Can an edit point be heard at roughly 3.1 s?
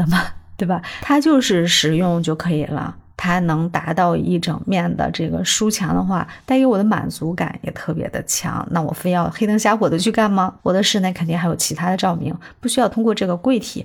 no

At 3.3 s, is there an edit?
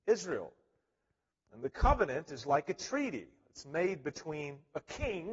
no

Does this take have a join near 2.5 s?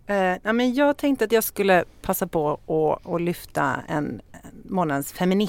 no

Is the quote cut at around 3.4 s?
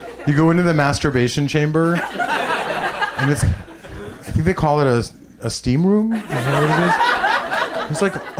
yes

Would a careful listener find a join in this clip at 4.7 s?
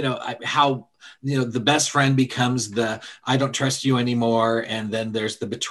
no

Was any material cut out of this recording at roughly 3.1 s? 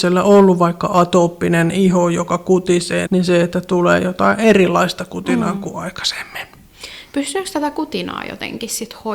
yes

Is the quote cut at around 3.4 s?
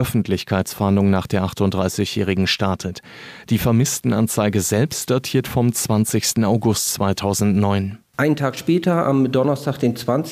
no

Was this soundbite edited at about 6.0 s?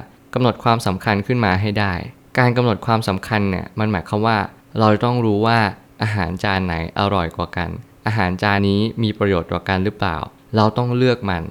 no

